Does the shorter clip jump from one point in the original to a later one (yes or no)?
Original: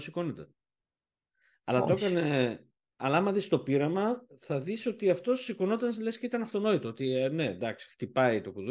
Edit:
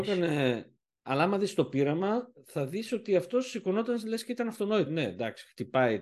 yes